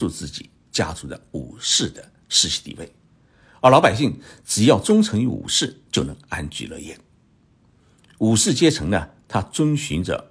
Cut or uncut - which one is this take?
uncut